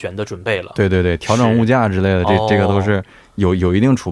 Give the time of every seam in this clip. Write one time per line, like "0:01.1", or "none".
none